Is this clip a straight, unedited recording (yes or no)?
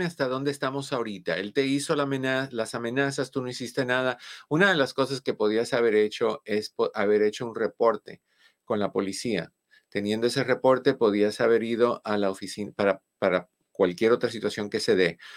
yes